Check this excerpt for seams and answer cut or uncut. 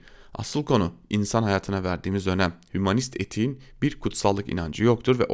uncut